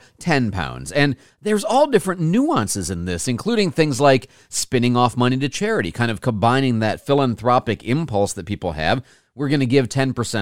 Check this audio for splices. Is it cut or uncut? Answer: uncut